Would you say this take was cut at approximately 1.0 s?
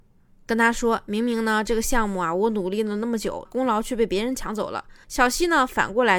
no; 2 cuts; at 3.5 s, 5.0 s

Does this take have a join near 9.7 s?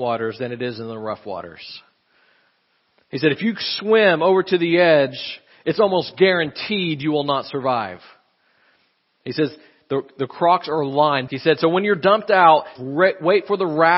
no; 2 cuts; at 11.3 s, 12.8 s

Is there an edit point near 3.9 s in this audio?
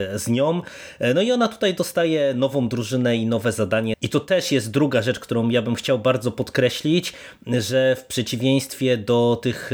yes; 1 cut; at 3.9 s

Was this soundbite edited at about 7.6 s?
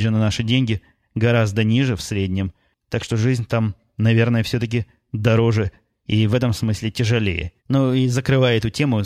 yes; 1 cut; at 7.6 s

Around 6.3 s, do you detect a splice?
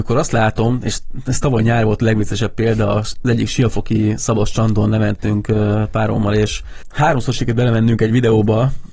no; 0 cuts

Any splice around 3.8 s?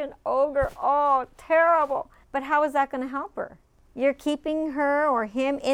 no; 1 cut; at 2.2 s

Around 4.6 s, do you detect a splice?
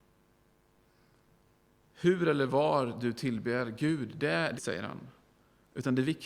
yes; 1 cut; at 4.6 s

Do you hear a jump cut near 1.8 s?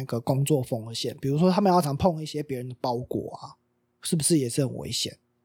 yes; 1 cut; at 1.8 s

